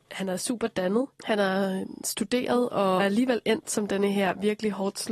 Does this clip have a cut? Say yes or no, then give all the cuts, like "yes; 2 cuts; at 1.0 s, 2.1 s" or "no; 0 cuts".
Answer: yes; 2 cuts; at 1.1 s, 3.0 s